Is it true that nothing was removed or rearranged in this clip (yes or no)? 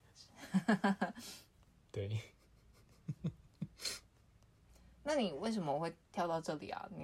yes